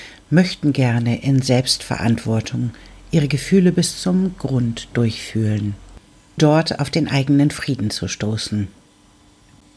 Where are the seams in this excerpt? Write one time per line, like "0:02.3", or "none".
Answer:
0:06.4